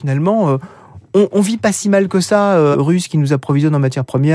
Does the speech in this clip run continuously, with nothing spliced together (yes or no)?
no